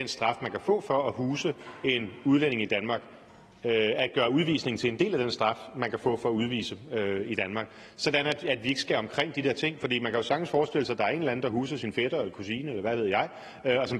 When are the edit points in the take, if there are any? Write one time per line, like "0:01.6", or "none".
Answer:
none